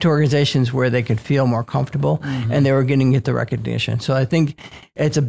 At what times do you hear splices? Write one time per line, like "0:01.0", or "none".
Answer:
none